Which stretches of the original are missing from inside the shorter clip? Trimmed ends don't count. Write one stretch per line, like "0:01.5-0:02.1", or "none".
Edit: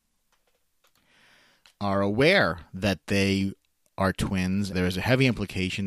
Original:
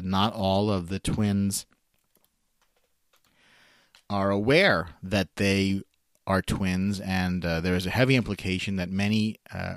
0:07.0-0:07.6

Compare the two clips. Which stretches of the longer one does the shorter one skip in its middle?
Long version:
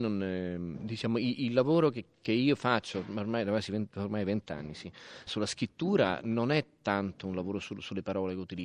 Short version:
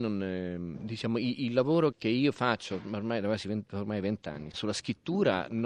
0:01.9-0:02.2
0:04.7-0:05.2

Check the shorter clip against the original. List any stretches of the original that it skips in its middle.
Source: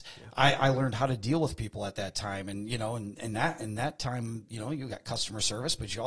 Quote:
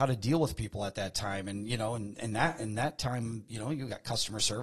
none

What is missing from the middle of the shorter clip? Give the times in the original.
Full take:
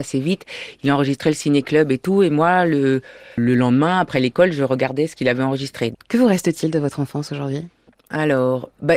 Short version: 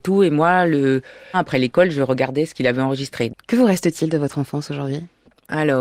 0:03.3-0:03.9

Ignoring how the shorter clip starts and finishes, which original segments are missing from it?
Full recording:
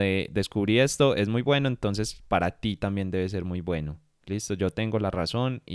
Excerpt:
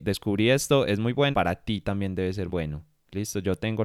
0:01.6-0:02.3
0:03.4-0:03.6

